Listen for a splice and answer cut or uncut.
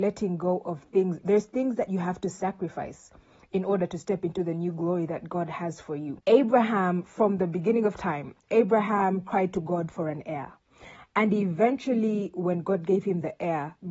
uncut